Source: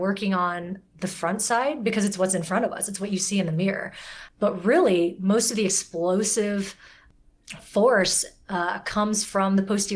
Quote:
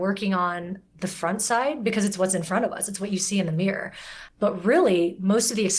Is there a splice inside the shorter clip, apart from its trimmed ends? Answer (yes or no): no